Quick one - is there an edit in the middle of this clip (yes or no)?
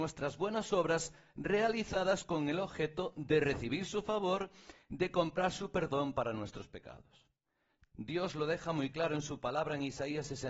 yes